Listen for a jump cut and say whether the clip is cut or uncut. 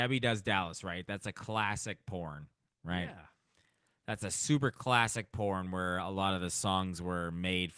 uncut